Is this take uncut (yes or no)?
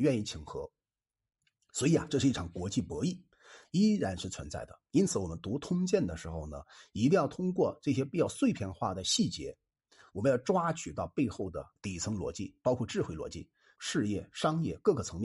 no